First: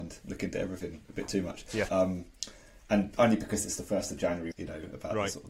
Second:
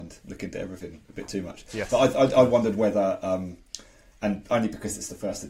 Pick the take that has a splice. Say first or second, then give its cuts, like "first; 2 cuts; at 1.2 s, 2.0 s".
first; 2 cuts; at 1.9 s, 4.5 s